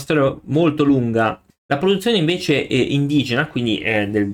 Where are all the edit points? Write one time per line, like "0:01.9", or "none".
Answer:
0:01.5